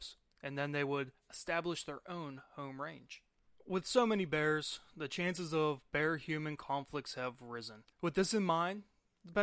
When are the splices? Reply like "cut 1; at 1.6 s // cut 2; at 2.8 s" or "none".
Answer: cut 1; at 3.5 s // cut 2; at 7.9 s